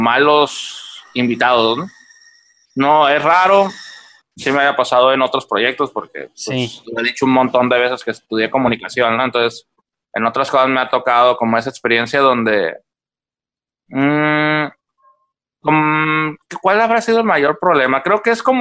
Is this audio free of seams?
no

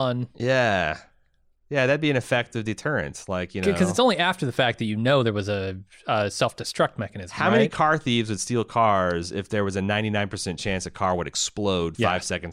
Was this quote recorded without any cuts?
yes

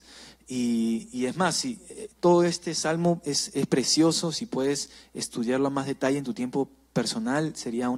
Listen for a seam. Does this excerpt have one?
no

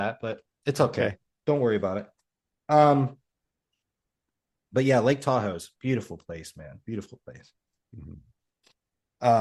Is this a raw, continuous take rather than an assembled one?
yes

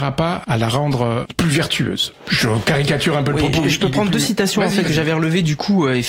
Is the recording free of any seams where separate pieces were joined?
yes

